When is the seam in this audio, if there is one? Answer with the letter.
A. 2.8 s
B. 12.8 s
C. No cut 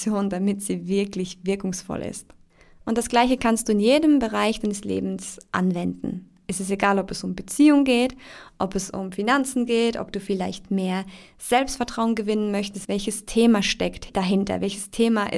B